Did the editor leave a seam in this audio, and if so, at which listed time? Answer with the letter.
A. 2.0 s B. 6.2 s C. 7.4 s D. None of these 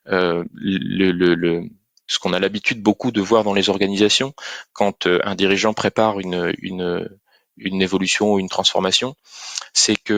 D